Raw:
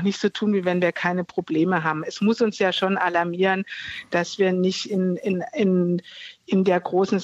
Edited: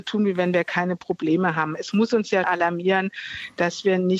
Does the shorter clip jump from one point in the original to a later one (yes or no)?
yes